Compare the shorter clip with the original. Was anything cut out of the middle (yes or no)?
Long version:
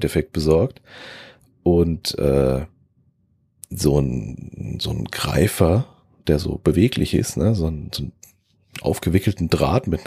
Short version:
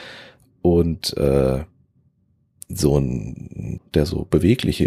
yes